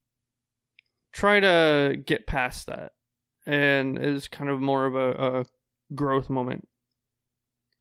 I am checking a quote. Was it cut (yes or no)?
no